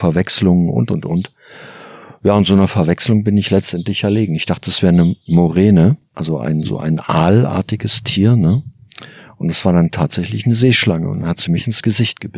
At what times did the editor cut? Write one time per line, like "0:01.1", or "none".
none